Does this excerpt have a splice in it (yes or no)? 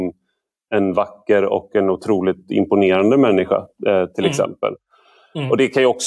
no